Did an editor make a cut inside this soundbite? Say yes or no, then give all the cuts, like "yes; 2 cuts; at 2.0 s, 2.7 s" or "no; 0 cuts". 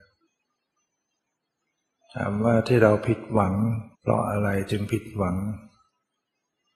yes; 1 cut; at 3.9 s